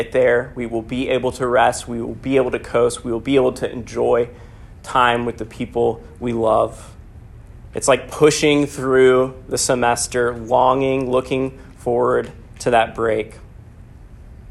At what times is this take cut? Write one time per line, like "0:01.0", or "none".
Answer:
none